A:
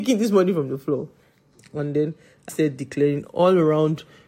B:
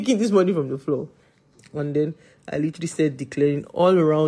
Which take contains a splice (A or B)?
A